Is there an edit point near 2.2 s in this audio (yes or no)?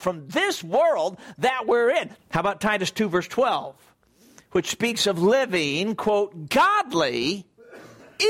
yes